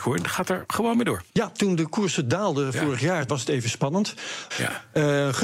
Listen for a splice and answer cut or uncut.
cut